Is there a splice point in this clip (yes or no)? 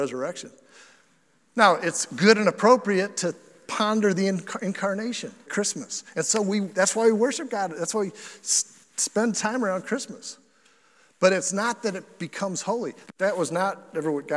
yes